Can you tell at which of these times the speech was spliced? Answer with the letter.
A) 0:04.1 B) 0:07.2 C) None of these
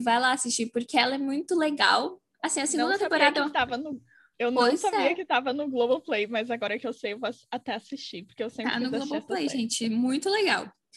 C